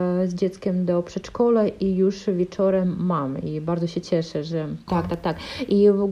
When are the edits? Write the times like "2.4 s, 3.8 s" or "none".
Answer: 4.9 s